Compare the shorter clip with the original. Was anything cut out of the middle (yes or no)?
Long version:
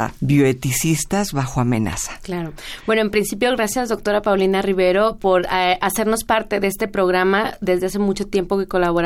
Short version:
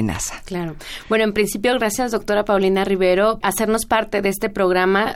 yes